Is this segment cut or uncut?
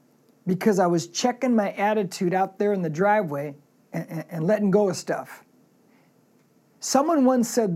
uncut